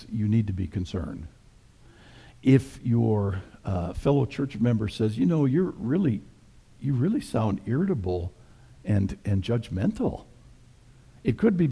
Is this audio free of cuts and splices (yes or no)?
yes